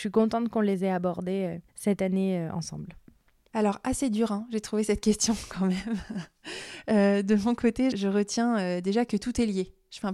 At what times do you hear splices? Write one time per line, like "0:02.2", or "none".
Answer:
0:01.7
0:07.9